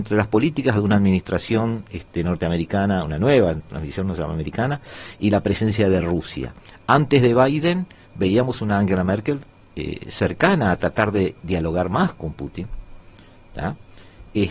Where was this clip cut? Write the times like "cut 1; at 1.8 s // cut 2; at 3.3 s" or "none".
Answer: none